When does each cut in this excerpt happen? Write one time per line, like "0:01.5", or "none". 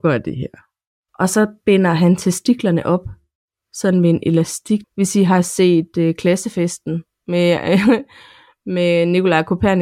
0:01.1
0:04.8